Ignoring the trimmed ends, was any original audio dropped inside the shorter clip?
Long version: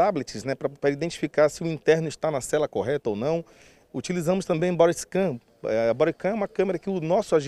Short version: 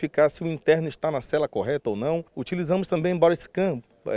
yes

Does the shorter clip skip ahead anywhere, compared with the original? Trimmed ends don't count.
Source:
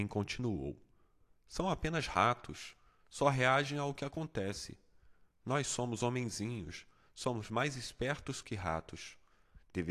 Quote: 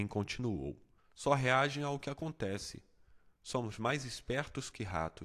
yes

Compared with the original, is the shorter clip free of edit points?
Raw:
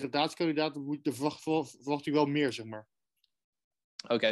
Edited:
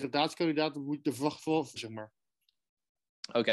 no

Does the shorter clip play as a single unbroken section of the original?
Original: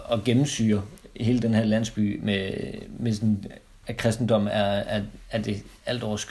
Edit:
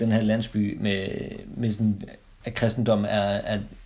yes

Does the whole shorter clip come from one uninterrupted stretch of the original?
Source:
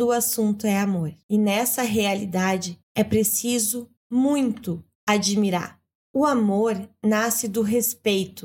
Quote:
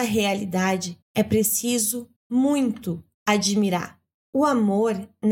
yes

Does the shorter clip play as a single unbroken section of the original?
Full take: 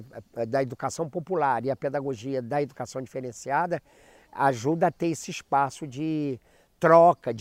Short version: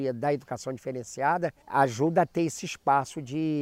no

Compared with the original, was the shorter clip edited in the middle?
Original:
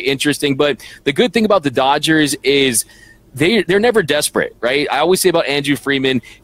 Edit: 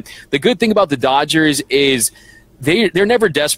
no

